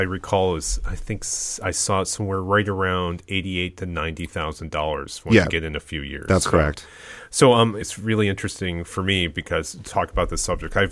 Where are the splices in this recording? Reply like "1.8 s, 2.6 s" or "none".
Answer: 7.8 s